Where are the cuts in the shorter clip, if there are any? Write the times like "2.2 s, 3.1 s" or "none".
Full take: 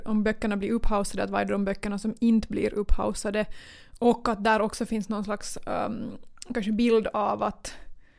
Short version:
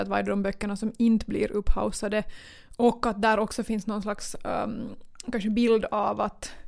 none